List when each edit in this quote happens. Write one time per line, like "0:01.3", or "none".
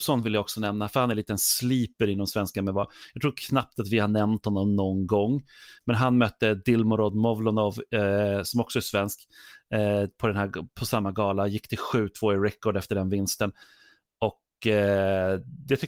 none